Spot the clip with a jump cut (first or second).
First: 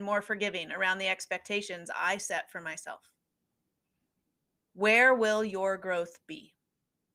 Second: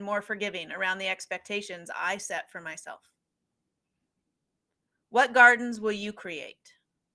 first